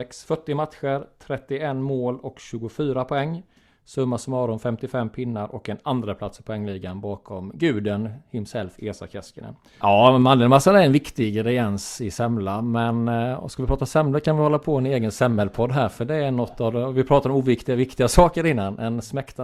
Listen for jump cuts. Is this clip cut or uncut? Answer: cut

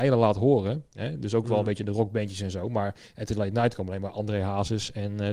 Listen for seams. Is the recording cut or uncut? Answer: uncut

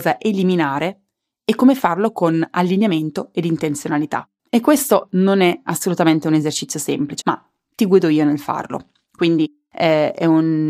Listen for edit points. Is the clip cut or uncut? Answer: cut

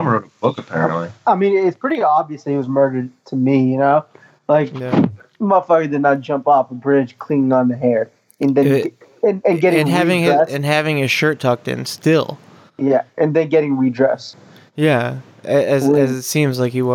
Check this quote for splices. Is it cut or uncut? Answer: uncut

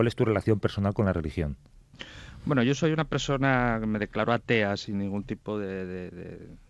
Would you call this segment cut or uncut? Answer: uncut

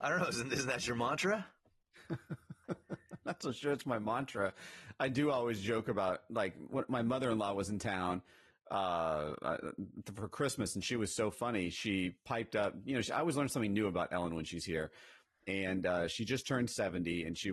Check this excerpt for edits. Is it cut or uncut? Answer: uncut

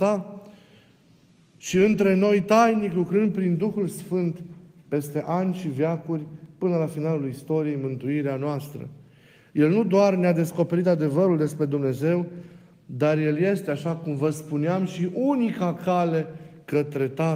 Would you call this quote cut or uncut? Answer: uncut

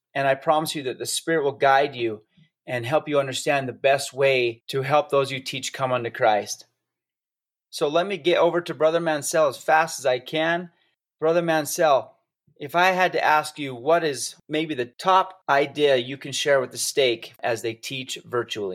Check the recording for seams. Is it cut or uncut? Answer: uncut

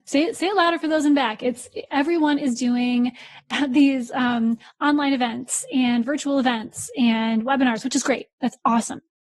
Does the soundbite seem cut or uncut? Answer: uncut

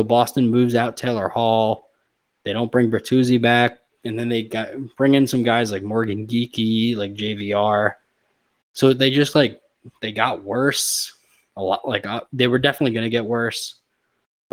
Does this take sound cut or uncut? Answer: uncut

